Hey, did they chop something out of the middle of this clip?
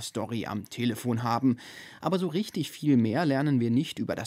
no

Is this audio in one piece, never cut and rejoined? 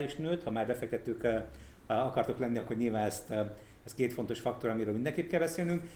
yes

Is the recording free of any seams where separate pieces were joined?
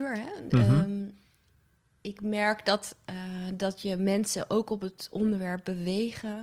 yes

